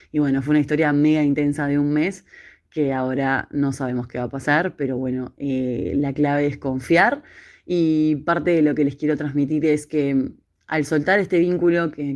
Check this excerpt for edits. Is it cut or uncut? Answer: uncut